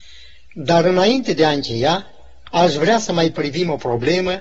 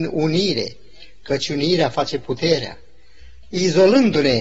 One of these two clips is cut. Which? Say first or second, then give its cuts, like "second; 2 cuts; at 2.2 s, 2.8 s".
second; 1 cut; at 3.4 s